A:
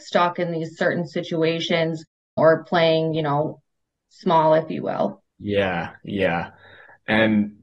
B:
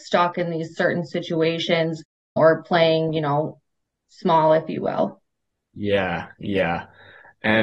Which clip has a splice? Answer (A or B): A